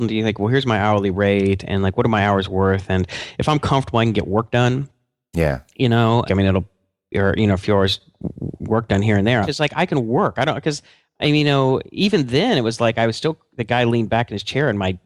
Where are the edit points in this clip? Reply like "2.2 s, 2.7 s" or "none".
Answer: 6.3 s, 9.4 s